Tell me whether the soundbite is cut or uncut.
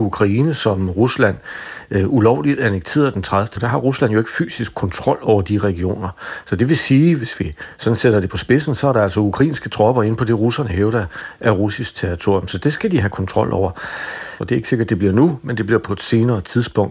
cut